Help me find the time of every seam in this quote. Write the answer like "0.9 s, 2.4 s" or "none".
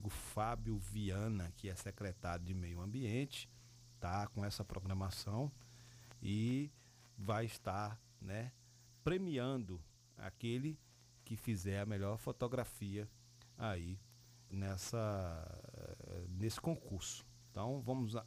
14.5 s